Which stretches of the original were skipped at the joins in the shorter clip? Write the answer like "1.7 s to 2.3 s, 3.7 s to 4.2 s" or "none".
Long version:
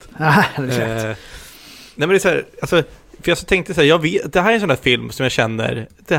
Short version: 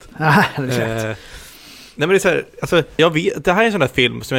3.0 s to 3.9 s